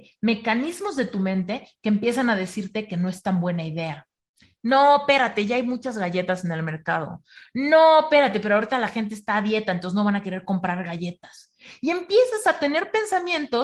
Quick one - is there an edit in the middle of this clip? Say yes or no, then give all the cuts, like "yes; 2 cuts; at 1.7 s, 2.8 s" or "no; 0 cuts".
no; 0 cuts